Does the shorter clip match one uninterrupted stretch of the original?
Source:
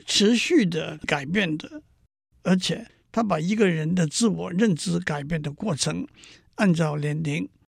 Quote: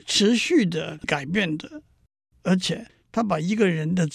yes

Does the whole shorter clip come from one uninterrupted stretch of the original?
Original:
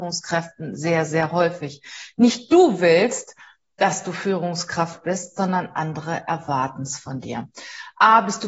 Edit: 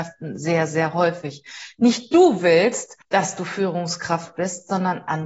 no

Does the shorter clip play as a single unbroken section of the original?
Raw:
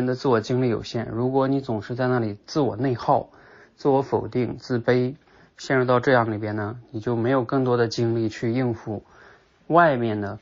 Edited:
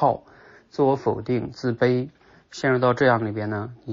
yes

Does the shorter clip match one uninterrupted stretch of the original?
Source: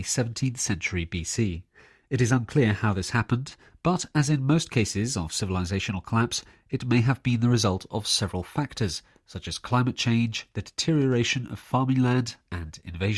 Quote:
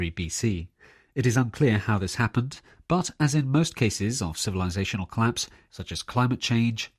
no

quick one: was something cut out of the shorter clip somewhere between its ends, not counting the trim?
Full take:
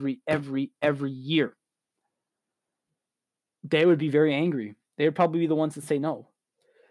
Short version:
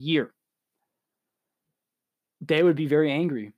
no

